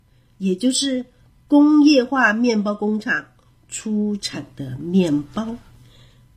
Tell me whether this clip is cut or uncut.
uncut